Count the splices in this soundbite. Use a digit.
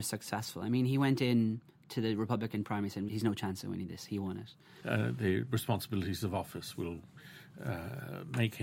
2